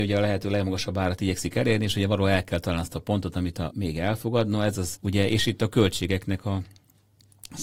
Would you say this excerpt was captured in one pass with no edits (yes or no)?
no